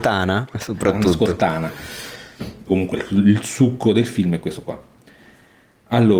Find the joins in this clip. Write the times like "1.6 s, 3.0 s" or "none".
2.7 s